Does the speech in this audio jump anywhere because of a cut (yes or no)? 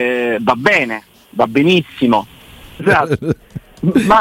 yes